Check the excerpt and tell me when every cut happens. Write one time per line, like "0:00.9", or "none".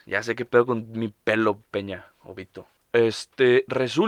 0:02.8